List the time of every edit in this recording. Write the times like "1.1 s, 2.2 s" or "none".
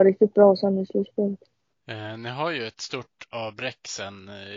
1.8 s